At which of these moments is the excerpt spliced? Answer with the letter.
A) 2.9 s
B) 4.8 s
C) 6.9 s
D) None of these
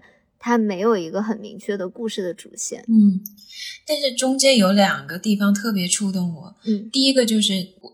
D